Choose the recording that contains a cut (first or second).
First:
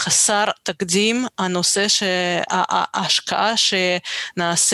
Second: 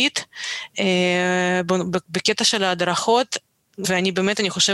second